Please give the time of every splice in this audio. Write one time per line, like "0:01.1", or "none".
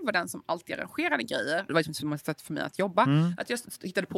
0:01.7